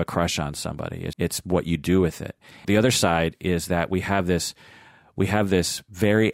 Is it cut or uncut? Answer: cut